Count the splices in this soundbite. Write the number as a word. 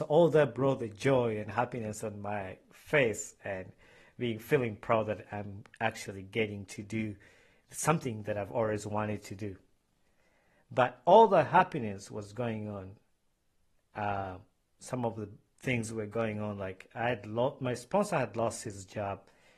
zero